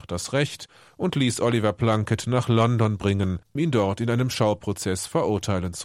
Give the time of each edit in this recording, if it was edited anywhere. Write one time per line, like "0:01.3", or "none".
0:03.6

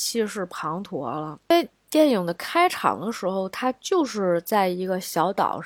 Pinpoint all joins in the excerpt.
none

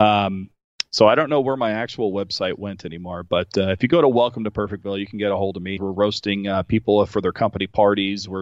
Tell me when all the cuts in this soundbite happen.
0:05.8

